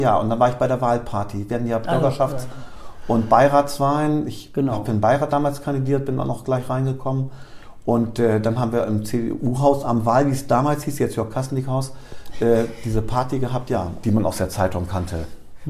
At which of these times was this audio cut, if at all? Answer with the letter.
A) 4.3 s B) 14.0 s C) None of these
B